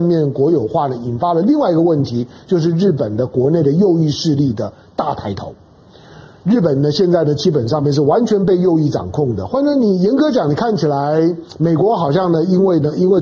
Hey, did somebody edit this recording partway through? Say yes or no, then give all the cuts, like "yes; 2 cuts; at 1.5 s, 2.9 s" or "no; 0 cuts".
no; 0 cuts